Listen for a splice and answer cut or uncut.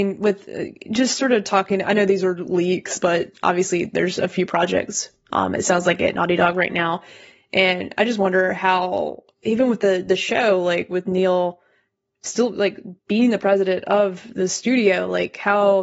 uncut